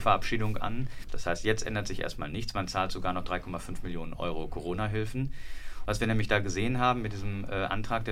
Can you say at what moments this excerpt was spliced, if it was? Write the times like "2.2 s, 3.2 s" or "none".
1.1 s, 5.8 s